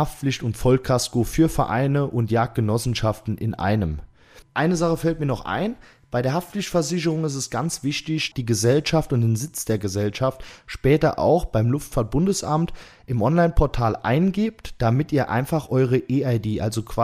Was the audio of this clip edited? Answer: yes; 2 cuts; at 4.4 s, 8.3 s

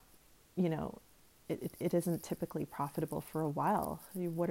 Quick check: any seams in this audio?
yes; 1 cut; at 1.5 s

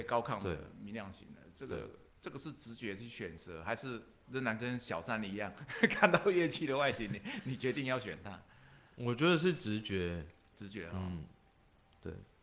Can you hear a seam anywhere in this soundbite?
no; 0 cuts

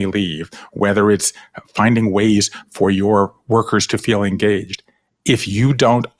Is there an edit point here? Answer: no; 0 cuts

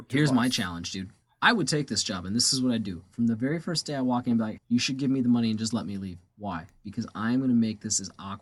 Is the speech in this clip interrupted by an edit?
yes; 1 cut; at 4.6 s

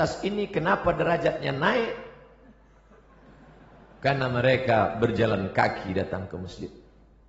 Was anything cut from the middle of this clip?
no; 0 cuts

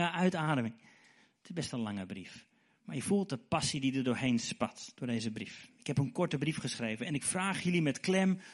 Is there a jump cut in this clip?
no; 0 cuts

